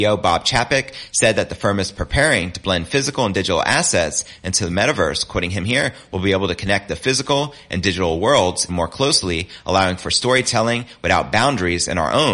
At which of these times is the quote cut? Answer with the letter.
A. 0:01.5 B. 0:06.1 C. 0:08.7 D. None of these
C